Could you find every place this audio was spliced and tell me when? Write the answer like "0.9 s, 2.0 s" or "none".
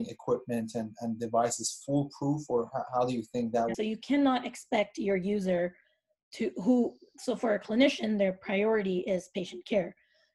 3.7 s